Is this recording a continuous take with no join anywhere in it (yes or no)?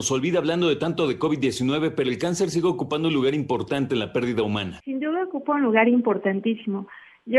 yes